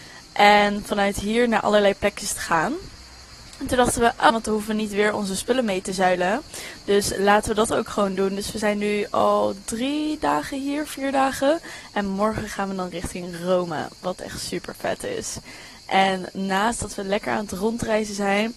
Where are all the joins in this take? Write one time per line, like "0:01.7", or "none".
0:04.3